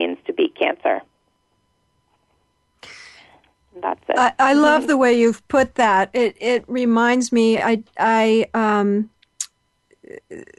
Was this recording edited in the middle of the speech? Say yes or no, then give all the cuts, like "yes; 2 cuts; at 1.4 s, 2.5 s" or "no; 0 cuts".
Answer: no; 0 cuts